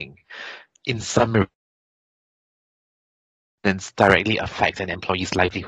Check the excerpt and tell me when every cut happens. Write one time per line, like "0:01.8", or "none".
none

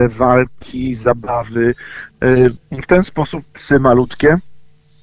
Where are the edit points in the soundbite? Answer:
0:02.6

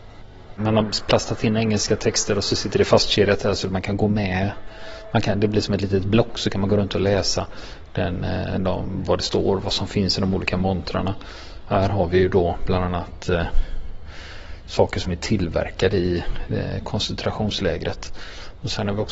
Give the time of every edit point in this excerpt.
none

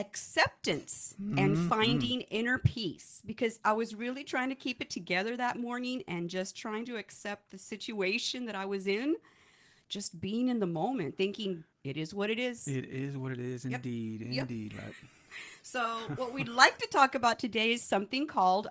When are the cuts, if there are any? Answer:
0:11.7

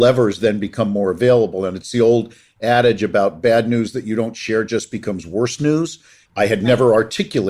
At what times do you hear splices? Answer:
0:06.3

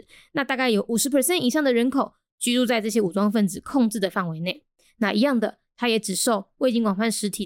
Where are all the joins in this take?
none

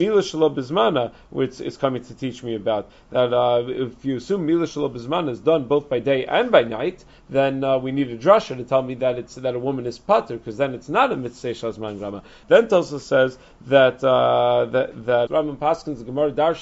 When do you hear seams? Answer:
0:12.4
0:15.3

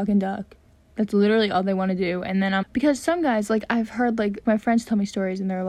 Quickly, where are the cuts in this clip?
0:02.6
0:04.4

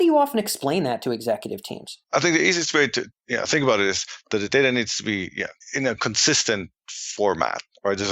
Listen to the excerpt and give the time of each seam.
0:02.0
0:03.1
0:05.6

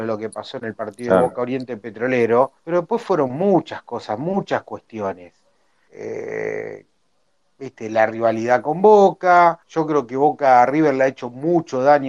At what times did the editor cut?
0:02.6
0:05.9
0:09.6

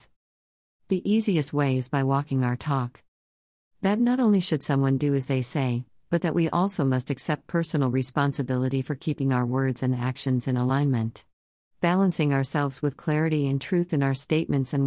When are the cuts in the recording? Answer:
none

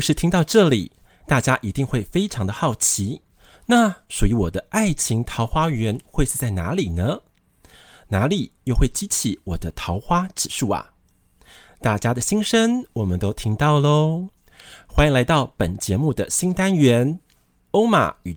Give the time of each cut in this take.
none

